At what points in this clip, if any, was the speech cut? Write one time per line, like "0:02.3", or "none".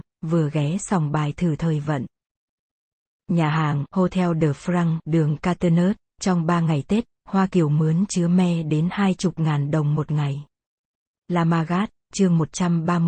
0:11.1